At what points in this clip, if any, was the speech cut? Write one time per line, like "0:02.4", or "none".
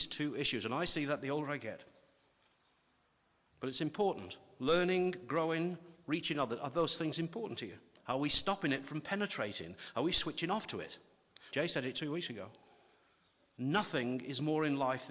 0:03.5
0:07.9
0:11.5